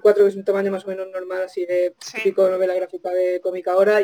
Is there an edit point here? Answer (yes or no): no